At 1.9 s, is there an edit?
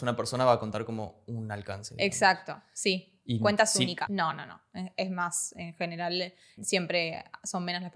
no; 2 cuts; at 4.1 s, 6.6 s

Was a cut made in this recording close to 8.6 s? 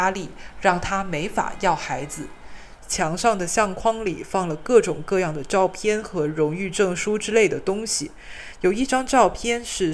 no; 1 cut; at 2.8 s

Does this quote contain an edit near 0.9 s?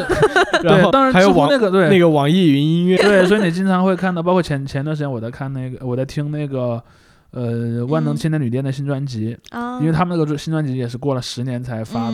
yes; 2 cuts; at 0.9 s, 3.0 s

